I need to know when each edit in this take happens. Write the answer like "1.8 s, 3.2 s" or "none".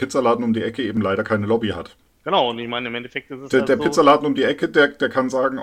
none